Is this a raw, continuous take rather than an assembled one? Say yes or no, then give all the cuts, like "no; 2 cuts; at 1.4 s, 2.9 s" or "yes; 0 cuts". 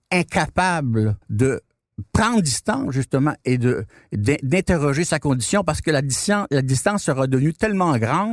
no; 1 cut; at 1.2 s